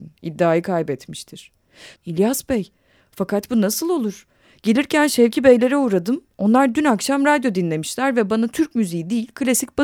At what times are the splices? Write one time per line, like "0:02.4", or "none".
0:02.0